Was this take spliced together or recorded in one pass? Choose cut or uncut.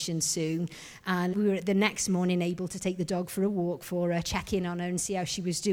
cut